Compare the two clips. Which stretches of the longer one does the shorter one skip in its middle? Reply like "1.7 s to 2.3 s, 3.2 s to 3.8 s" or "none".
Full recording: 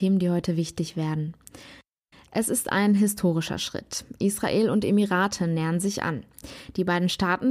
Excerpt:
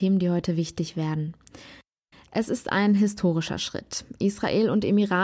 none